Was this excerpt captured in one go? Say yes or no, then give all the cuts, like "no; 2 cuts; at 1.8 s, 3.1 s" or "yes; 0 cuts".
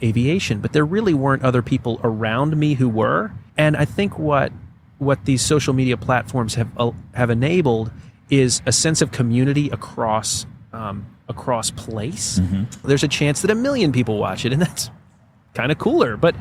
no; 2 cuts; at 3.5 s, 12.8 s